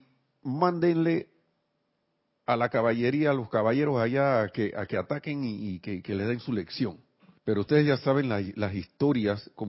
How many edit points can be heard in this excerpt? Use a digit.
1